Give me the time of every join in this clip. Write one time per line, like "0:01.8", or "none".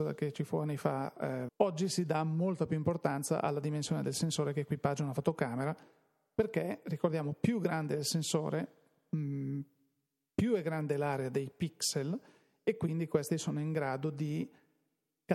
0:01.5